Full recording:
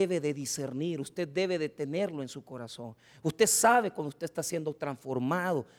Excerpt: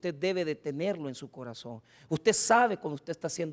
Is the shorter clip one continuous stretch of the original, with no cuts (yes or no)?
yes